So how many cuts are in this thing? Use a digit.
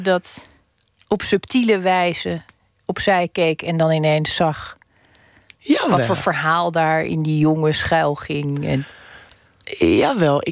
0